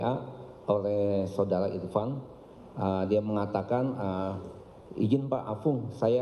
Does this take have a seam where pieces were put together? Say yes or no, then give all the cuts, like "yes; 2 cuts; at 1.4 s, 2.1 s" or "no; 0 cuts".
no; 0 cuts